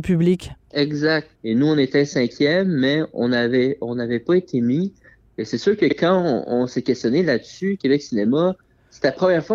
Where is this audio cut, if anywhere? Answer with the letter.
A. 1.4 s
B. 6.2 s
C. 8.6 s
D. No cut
A